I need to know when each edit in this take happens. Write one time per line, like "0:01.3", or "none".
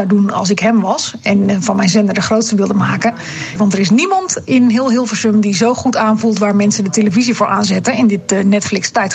0:03.6